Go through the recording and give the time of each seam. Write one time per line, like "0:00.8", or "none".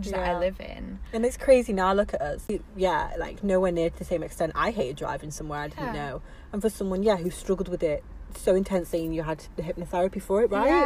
0:02.5